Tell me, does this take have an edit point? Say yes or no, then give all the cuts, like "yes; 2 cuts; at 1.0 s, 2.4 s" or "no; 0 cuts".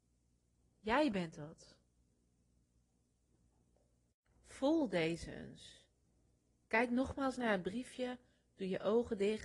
no; 0 cuts